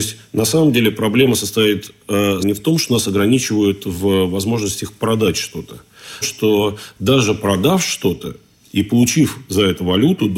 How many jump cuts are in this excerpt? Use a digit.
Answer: 2